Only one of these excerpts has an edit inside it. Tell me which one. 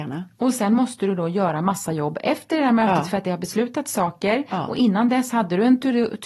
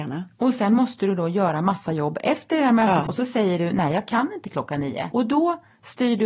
second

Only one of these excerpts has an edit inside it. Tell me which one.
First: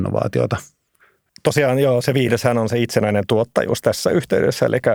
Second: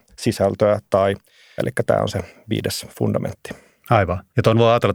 second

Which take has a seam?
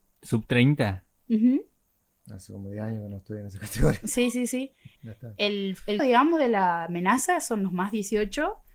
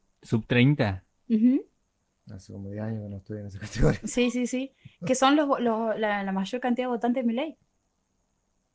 first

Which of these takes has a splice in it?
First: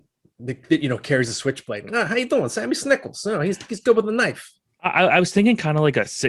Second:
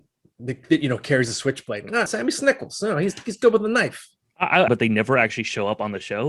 second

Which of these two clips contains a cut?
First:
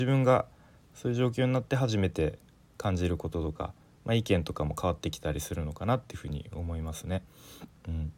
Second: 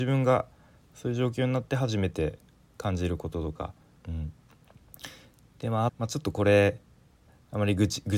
second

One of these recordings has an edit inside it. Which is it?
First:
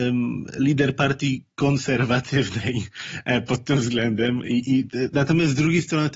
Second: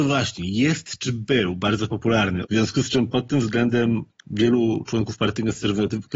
second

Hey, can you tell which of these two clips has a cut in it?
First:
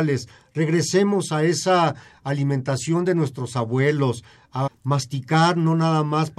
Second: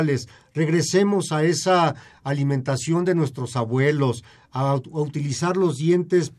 first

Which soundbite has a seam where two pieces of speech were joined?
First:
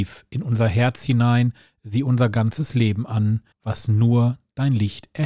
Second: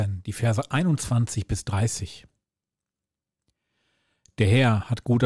first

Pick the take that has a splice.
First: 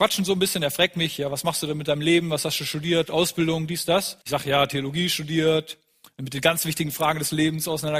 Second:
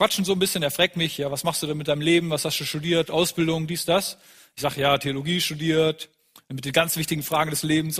first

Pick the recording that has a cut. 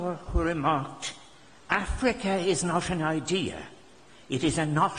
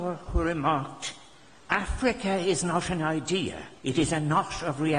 second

